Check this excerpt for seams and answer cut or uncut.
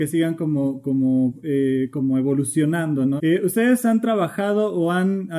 cut